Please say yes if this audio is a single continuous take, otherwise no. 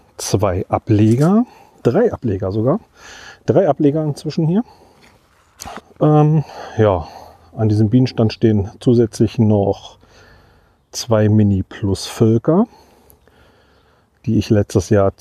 no